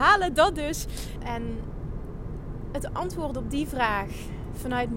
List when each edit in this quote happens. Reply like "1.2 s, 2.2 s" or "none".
1.2 s